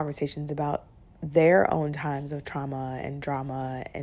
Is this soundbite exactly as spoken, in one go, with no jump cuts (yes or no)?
no